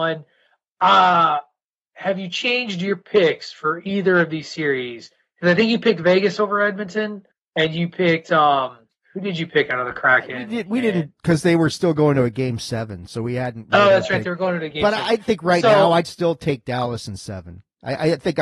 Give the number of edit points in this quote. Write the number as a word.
zero